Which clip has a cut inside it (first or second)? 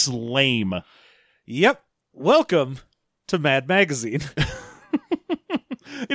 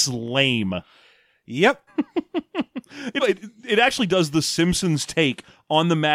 second